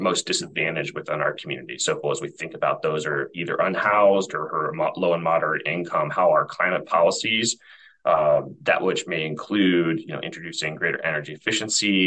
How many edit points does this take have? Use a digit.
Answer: 1